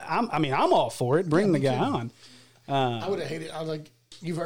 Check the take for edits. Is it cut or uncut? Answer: uncut